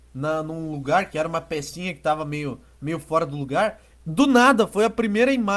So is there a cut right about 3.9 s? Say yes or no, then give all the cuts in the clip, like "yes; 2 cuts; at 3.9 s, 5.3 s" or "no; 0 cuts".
yes; 1 cut; at 3.9 s